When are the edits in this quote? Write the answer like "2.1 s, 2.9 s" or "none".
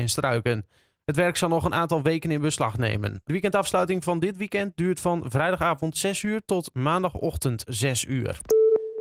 1.0 s, 3.2 s